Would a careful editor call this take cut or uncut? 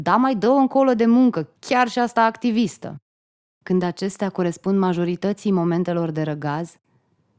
uncut